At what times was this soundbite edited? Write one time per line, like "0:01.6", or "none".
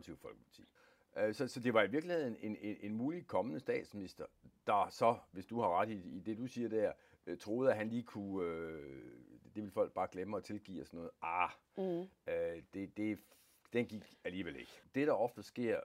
none

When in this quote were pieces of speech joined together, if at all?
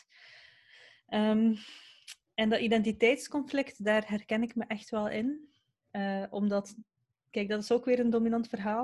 none

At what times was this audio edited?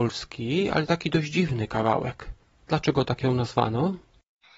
0:02.6

